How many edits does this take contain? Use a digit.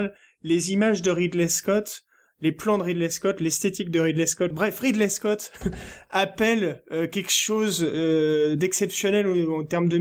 1